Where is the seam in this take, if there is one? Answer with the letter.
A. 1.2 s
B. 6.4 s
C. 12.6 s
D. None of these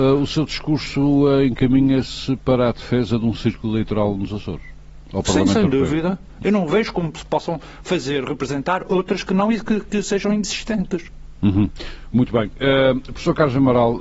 B